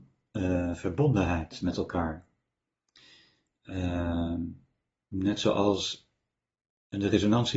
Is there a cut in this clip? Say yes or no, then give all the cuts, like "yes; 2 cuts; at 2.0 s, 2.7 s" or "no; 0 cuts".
no; 0 cuts